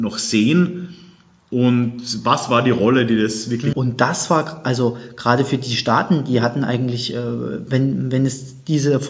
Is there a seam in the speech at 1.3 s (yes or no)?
no